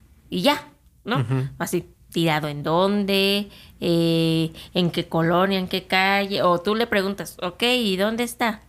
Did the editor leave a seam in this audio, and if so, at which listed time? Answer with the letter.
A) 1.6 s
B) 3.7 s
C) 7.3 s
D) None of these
D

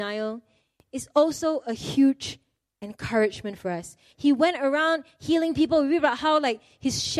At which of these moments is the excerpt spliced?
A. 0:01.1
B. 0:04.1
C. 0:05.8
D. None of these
B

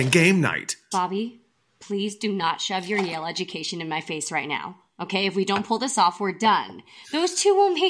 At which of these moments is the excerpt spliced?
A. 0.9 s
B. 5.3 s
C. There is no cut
A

